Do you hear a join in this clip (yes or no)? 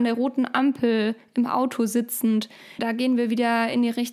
yes